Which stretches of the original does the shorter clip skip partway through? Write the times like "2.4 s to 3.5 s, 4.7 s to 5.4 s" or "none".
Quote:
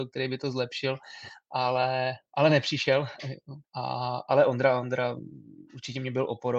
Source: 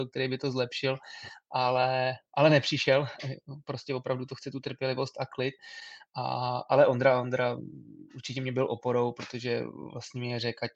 3.6 s to 6.0 s